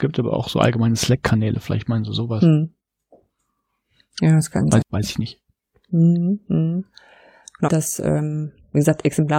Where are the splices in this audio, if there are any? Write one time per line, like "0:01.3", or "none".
0:04.8
0:07.7